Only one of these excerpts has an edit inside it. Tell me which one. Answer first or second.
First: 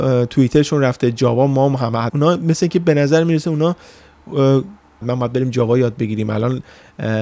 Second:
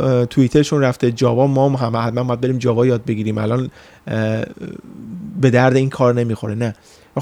first